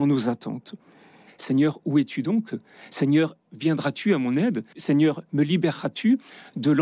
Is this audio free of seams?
no; 1 cut; at 1.3 s

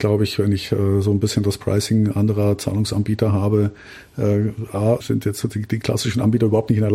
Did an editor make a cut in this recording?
yes; 1 cut; at 5.0 s

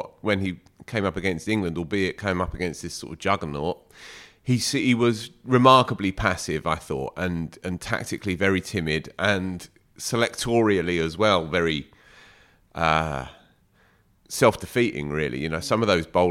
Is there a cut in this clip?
no; 0 cuts

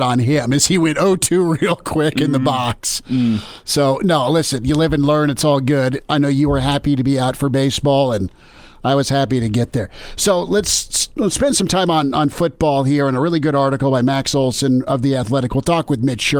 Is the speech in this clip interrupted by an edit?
no; 0 cuts

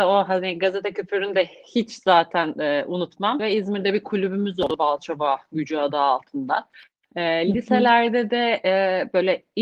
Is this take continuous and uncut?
no; 1 cut; at 3.4 s

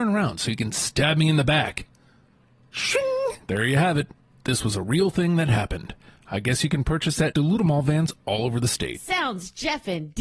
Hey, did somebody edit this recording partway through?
yes; 1 cut; at 3.4 s

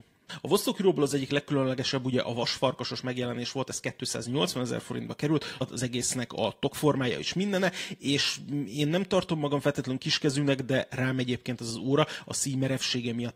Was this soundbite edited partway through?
yes; 1 cut; at 5.6 s

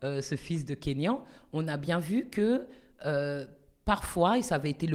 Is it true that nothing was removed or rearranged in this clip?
yes; 0 cuts

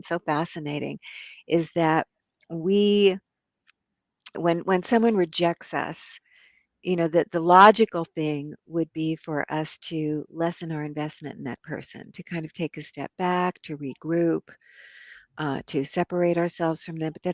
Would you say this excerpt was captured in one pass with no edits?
no; 1 cut; at 4.3 s

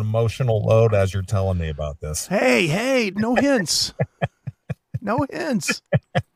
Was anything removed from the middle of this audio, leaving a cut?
yes; 1 cut; at 3.1 s

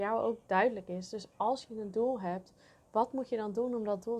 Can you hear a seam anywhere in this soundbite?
no; 0 cuts

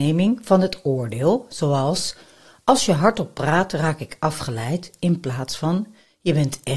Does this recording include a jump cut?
no; 0 cuts

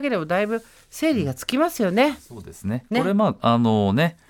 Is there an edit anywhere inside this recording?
no; 0 cuts

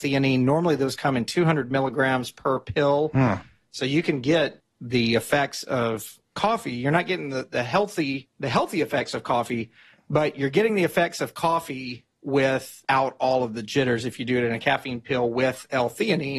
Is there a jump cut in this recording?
no; 0 cuts

